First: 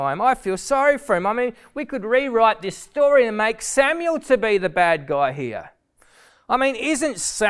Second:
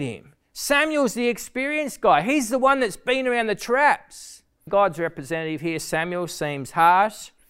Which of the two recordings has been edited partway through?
second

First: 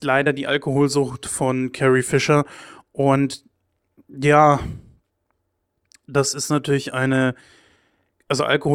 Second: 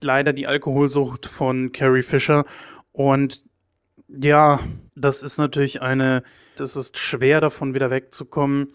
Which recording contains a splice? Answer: second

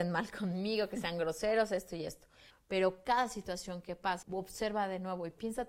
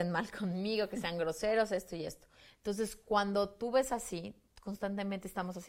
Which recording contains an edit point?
first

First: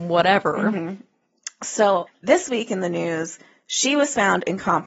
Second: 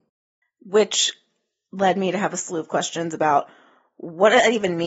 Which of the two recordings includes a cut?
first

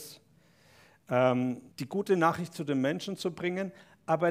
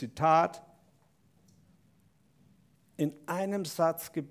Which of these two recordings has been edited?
first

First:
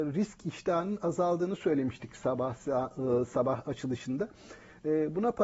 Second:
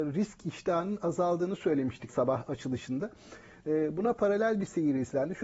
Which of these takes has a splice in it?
second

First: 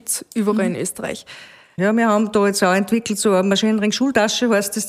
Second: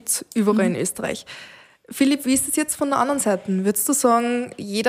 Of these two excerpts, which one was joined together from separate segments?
first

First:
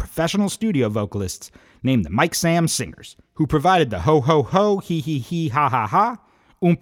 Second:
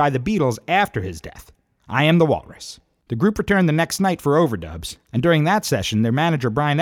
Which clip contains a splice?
second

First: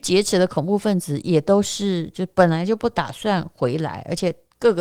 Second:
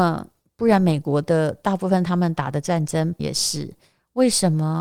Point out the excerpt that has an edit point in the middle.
second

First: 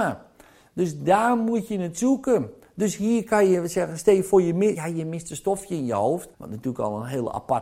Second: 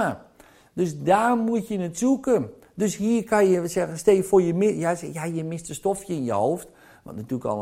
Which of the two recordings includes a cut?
first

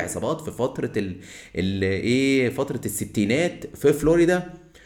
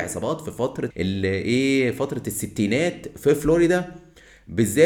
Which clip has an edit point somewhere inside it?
second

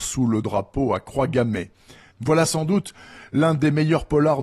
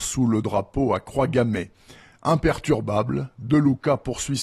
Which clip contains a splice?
first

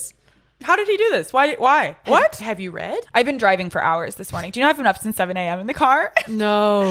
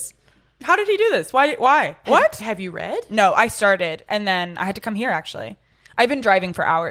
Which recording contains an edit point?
first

